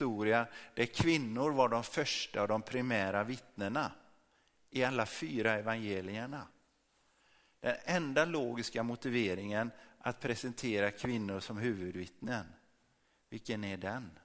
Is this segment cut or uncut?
uncut